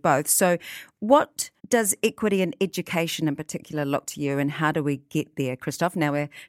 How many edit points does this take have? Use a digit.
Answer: 2